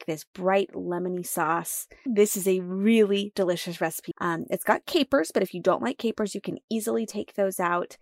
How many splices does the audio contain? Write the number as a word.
two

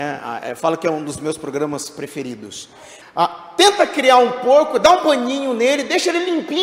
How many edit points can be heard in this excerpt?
one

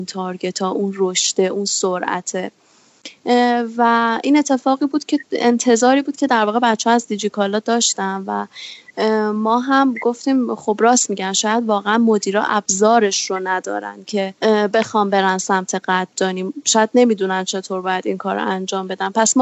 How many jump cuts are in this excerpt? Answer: one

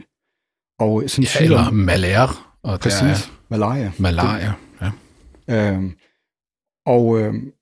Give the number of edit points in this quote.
zero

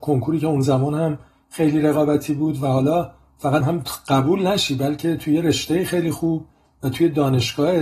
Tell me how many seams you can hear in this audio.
one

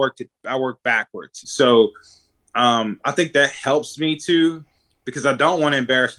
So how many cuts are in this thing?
one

